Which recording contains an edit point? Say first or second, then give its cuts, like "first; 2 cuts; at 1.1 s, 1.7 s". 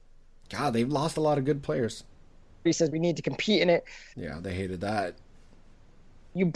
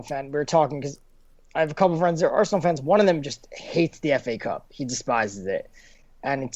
first; 2 cuts; at 2.7 s, 4.1 s